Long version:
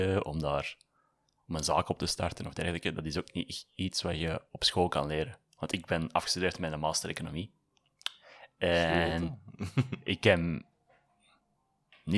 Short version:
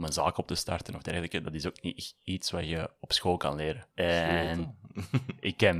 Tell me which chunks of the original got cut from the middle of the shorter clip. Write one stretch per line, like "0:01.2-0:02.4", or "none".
0:05.4-0:08.5